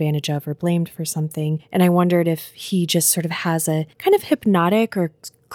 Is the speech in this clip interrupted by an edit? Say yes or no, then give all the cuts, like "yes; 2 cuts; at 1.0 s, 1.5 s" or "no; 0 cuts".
yes; 1 cut; at 3.9 s